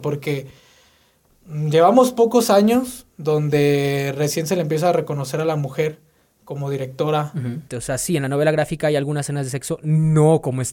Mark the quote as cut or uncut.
cut